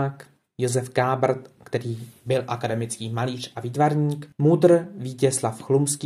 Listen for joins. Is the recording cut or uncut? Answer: uncut